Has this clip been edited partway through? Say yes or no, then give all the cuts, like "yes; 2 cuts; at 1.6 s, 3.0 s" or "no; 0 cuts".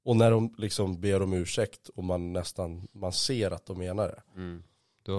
no; 0 cuts